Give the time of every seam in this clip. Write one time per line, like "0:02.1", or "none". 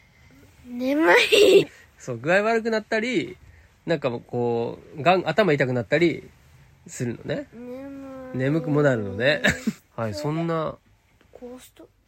0:01.6
0:09.8